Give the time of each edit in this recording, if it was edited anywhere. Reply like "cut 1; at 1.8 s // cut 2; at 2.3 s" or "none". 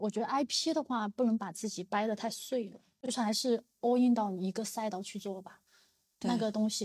none